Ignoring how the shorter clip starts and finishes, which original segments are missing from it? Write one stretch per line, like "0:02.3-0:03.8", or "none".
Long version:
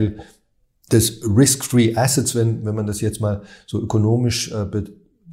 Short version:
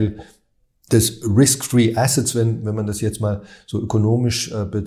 none